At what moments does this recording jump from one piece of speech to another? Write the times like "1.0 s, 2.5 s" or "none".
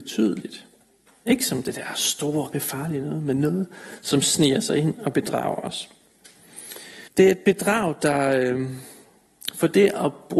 2.5 s, 7.1 s